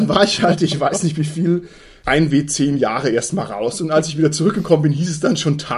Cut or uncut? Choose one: uncut